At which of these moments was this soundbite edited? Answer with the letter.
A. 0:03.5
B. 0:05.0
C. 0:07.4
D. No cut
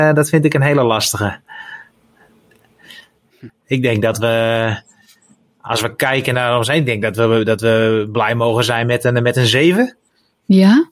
A